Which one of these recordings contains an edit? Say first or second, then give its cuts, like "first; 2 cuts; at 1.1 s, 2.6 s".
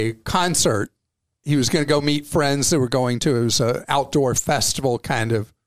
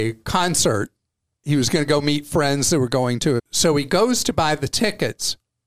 second; 1 cut; at 3.4 s